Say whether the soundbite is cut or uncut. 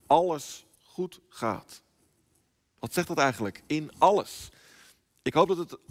uncut